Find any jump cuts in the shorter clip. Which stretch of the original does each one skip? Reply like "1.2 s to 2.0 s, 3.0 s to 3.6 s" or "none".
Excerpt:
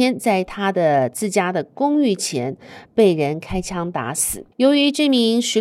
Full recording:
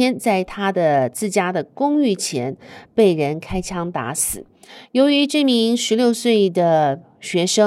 4.5 s to 4.9 s